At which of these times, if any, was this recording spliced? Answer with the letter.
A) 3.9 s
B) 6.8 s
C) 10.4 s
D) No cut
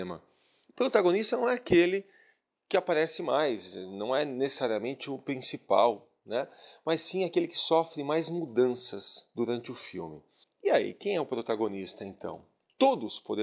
C